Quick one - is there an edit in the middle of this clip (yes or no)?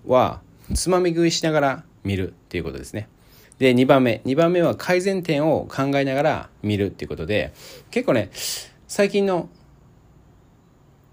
yes